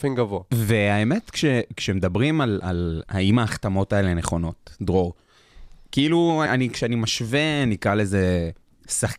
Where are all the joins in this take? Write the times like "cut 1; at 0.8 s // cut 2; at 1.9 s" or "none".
cut 1; at 3.1 s // cut 2; at 6.5 s